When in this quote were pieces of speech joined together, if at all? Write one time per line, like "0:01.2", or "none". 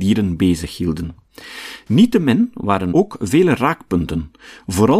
0:02.9